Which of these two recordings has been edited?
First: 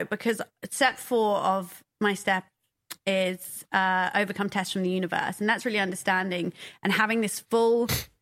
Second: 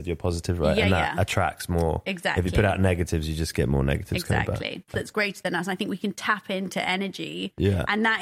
second; 1 cut; at 4.9 s

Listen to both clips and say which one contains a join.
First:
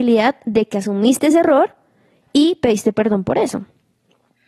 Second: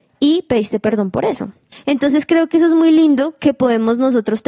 second; 1 cut; at 1.7 s

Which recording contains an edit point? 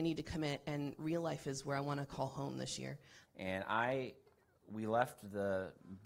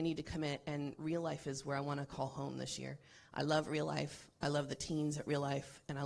first; 1 cut; at 3.2 s

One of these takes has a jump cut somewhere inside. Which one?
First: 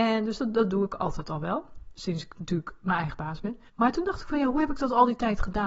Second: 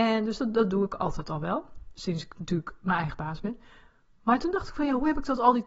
first; 1 cut; at 3.7 s

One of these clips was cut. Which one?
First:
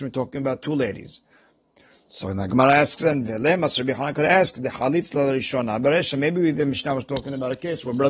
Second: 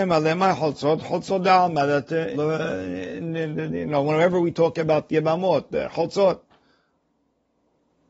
second; 1 cut; at 2.3 s

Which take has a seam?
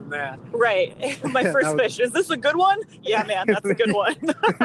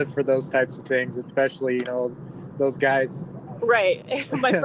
second; 1 cut; at 3.6 s

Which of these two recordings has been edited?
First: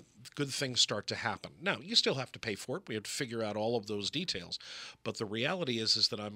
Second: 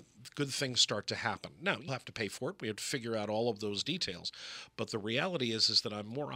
second; 1 cut; at 1.9 s

